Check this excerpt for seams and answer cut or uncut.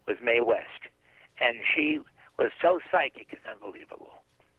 uncut